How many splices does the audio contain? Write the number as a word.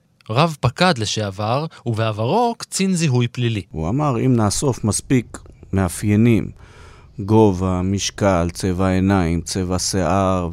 zero